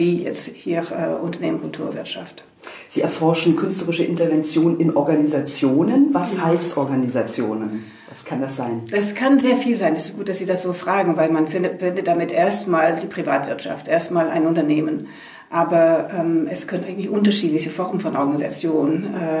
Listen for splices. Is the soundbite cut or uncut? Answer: uncut